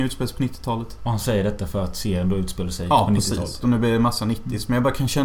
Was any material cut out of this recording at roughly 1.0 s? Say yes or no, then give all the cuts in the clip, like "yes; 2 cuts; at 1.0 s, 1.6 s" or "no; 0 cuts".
no; 1 cut; at 3.6 s